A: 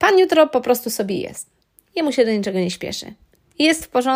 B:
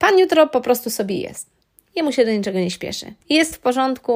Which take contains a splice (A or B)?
B